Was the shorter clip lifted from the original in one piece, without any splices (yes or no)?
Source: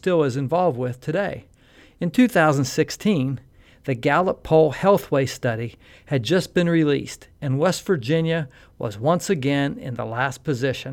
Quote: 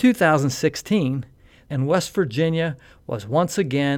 no